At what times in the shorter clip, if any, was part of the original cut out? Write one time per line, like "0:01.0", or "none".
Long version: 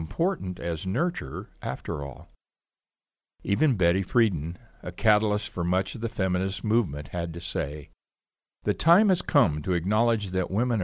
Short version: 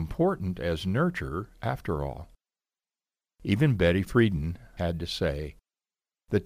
0:04.8